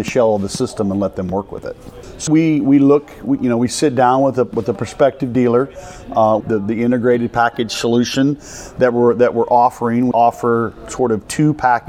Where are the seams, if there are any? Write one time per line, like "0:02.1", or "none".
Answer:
0:02.3
0:06.4
0:10.1